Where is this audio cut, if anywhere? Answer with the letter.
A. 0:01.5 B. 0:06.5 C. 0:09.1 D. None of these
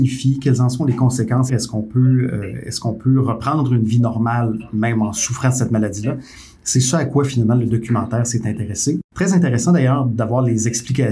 A